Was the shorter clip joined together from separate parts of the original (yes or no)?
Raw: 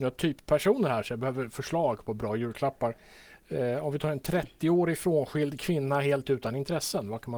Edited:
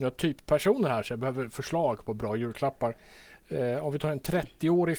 no